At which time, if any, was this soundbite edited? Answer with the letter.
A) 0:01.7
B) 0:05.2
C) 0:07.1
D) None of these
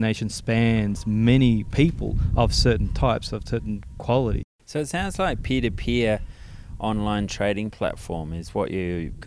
D